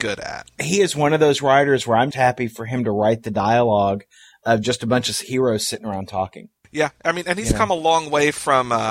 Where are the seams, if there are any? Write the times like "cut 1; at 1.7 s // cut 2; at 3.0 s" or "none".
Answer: cut 1; at 2.1 s